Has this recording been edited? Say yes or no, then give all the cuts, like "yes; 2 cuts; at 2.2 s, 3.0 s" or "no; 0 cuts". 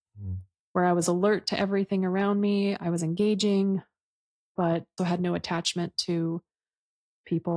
yes; 1 cut; at 5.0 s